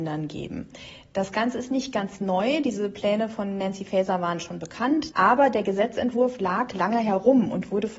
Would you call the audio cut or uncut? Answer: uncut